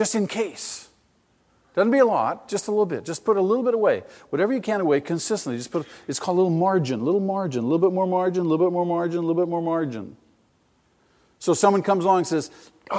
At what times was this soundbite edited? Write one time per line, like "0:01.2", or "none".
none